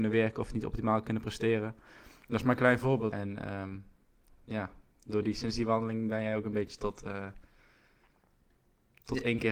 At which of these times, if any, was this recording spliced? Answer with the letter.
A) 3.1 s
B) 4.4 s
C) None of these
A